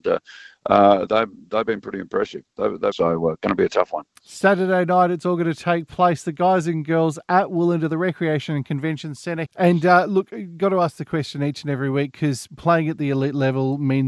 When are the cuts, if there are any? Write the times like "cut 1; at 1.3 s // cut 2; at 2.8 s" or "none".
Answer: cut 1; at 1.1 s // cut 2; at 2.9 s // cut 3; at 9.5 s